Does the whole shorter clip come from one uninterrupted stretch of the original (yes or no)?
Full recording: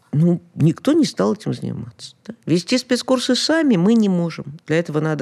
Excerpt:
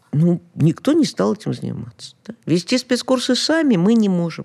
yes